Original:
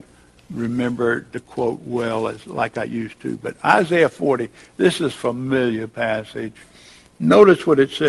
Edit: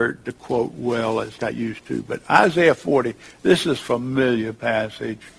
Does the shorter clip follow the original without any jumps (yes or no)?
no